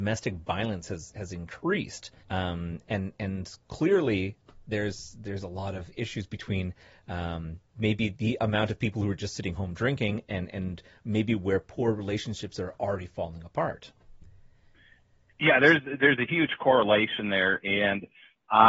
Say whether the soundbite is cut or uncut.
cut